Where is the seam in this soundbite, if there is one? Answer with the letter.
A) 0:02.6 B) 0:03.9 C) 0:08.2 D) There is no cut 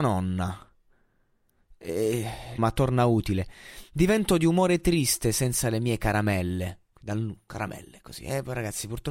A